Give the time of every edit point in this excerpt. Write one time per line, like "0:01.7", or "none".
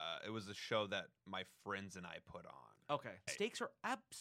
0:03.3